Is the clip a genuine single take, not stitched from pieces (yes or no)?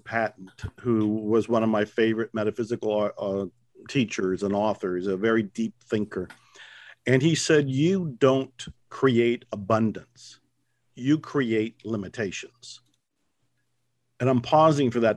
yes